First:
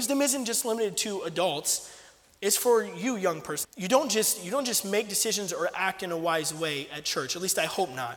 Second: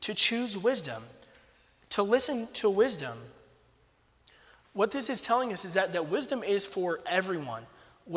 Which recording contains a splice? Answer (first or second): first